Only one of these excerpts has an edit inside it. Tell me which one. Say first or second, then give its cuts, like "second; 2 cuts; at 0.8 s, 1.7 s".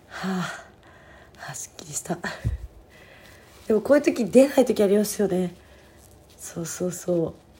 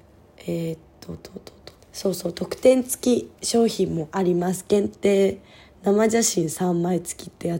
second; 1 cut; at 1.8 s